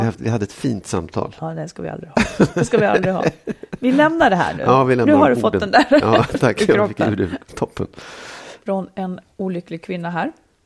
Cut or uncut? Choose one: cut